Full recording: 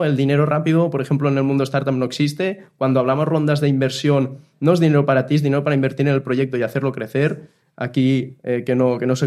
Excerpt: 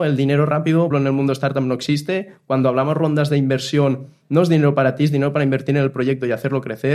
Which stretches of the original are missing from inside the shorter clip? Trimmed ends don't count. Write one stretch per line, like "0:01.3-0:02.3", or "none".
0:00.9-0:01.2